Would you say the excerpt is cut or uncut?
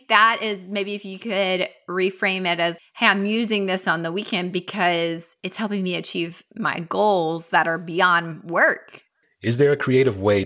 cut